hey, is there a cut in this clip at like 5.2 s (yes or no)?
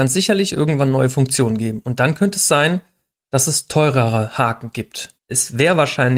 yes